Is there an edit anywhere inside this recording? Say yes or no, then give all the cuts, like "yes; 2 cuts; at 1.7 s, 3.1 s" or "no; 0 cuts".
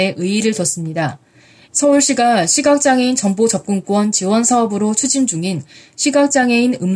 yes; 1 cut; at 1.6 s